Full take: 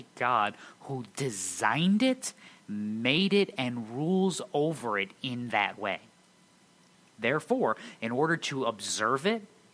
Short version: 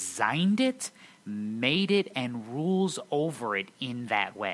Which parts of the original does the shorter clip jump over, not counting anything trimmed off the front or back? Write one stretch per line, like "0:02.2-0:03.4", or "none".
none

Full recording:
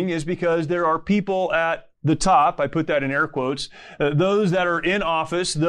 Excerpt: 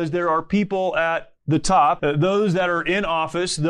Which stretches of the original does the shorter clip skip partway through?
0:02.6-0:04.0

